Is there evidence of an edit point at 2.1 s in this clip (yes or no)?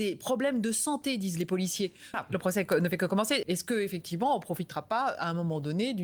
yes